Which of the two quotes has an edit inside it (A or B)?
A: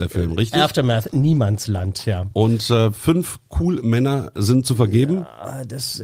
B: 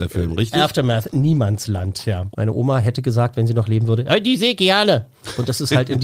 B